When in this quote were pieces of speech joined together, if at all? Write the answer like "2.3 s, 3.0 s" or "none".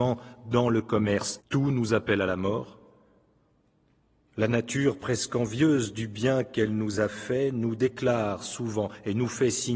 1.4 s